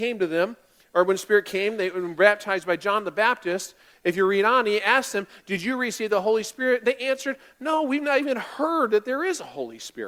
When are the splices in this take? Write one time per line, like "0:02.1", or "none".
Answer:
none